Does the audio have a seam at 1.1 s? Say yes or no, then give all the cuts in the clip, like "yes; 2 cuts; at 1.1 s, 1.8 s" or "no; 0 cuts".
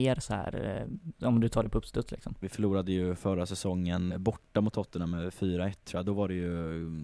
yes; 3 cuts; at 1.1 s, 2.4 s, 4.1 s